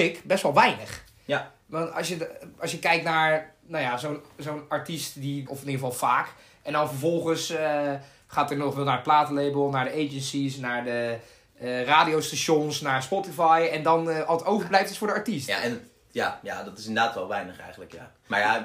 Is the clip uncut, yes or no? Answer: no